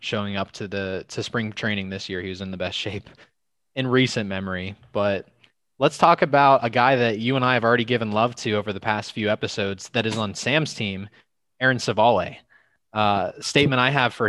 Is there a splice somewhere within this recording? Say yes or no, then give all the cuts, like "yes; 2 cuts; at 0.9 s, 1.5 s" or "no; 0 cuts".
no; 0 cuts